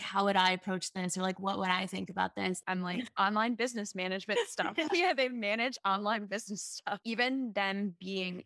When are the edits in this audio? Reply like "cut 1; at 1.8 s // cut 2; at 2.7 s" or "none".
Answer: cut 1; at 2.6 s // cut 2; at 7.0 s